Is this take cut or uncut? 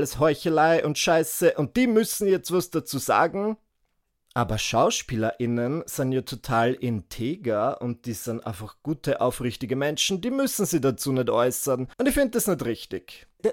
cut